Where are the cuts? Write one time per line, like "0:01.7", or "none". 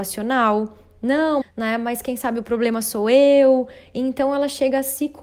0:01.4